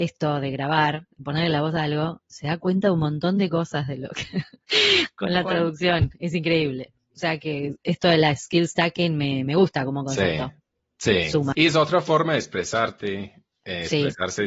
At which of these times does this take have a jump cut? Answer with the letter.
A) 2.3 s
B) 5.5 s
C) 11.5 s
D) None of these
C